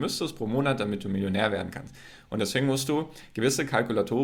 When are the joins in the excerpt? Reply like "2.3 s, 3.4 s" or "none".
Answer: none